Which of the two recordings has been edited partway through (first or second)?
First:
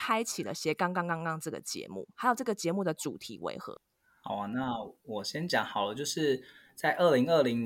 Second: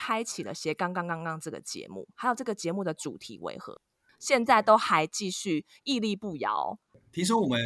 second